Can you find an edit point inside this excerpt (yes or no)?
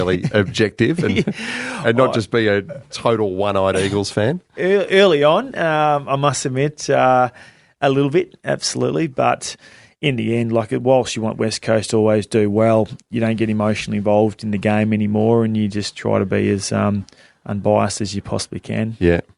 no